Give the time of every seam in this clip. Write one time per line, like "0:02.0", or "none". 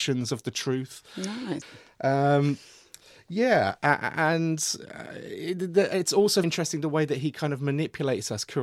0:01.6
0:06.4